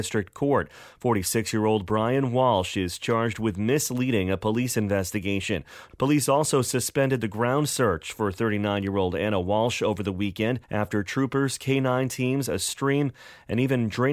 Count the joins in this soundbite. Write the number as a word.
two